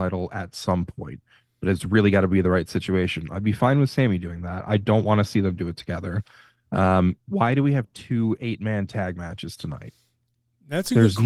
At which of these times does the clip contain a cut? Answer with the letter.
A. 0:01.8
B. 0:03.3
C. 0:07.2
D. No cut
C